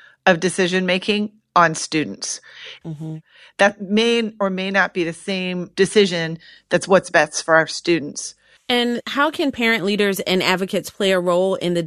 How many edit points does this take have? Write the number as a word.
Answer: two